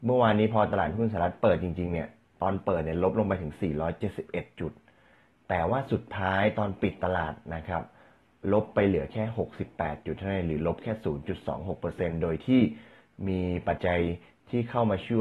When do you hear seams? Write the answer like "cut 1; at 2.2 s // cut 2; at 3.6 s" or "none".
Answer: cut 1; at 13.8 s